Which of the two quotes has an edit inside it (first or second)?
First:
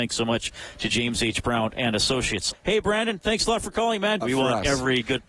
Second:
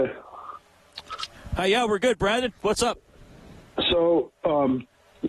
first